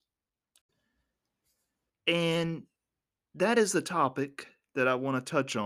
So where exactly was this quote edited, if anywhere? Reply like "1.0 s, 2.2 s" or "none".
1.9 s